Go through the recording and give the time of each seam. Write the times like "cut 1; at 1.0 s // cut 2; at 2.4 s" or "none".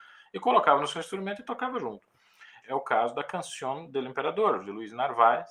cut 1; at 2.6 s

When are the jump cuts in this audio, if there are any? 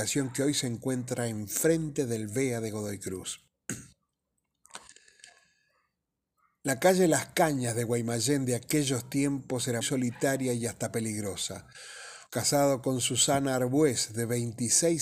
cut 1; at 9.8 s // cut 2; at 12.3 s

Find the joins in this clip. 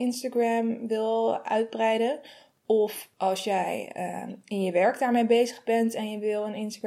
none

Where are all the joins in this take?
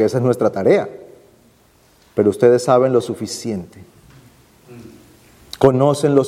none

